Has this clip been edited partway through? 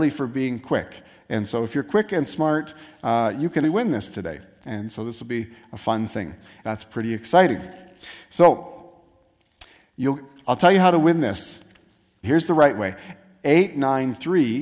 yes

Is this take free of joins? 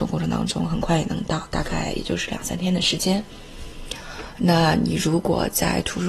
no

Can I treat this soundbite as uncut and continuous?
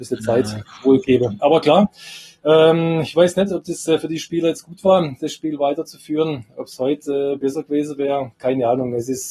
yes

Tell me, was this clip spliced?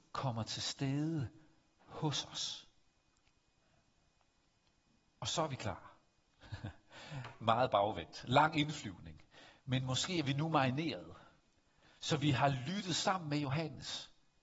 no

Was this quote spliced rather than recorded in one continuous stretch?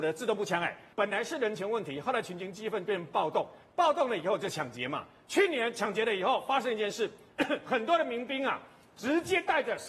yes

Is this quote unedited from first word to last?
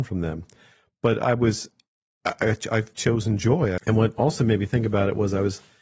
no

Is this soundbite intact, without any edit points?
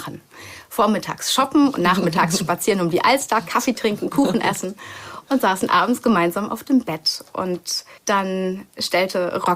no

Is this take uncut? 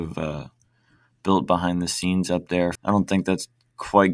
no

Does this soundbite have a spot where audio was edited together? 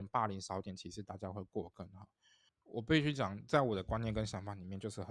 yes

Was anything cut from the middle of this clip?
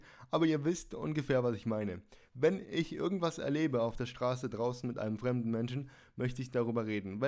no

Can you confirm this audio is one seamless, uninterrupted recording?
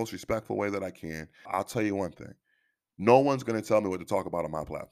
no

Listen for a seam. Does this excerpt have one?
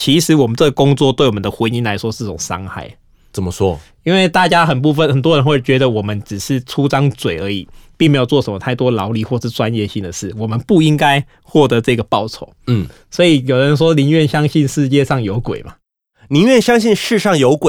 no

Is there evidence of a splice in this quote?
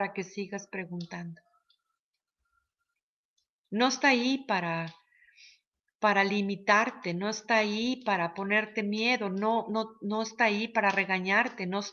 no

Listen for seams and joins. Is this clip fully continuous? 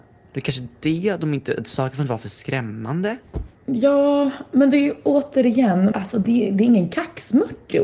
no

